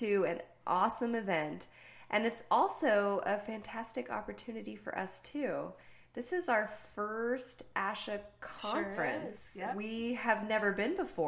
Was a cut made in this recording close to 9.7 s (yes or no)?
no